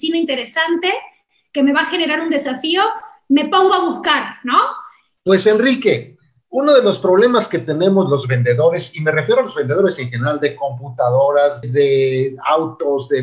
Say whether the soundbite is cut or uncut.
cut